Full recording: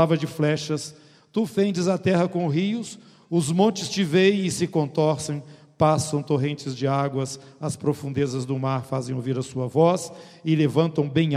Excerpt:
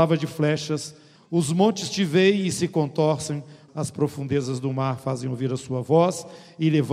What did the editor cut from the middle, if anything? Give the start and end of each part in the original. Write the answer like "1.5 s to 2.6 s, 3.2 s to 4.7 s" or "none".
1.2 s to 3.1 s, 5.7 s to 7.5 s